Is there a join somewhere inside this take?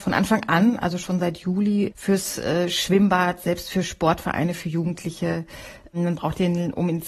no; 0 cuts

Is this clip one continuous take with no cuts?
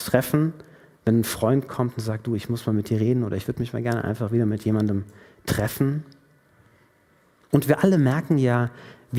no; 1 cut; at 7.5 s

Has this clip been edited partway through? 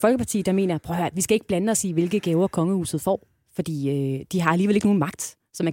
no; 0 cuts

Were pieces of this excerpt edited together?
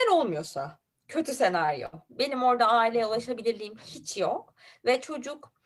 no; 0 cuts

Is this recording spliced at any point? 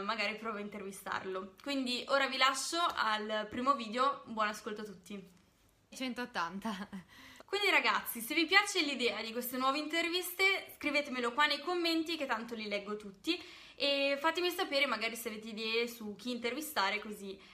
yes; 2 cuts; at 5.9 s, 7.4 s

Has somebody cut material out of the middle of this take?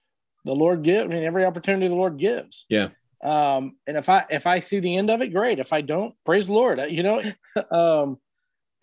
yes; 2 cuts; at 6.2 s, 7.2 s

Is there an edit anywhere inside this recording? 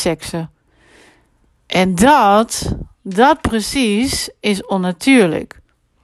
no; 0 cuts

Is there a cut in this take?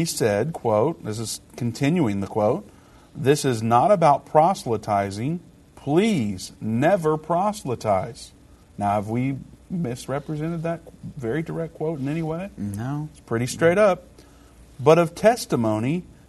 no; 0 cuts

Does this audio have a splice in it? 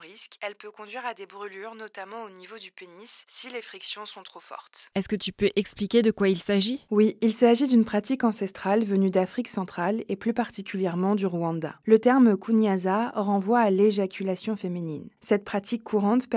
yes; 2 cuts; at 4.9 s, 15.2 s

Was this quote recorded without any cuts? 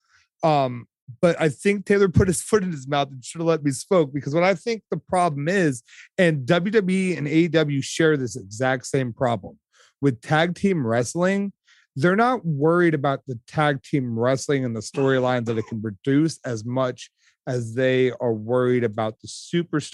yes; 0 cuts

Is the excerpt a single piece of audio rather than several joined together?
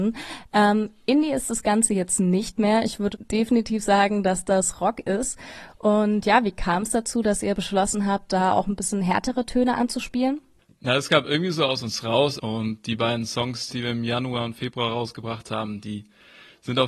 no; 3 cuts; at 3.1 s, 12.4 s, 13.7 s

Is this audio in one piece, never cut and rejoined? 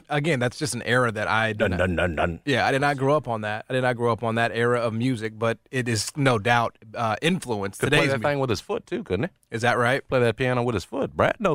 yes; 0 cuts

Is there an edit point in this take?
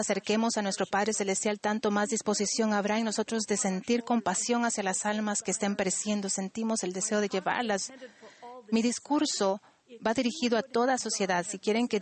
no; 0 cuts

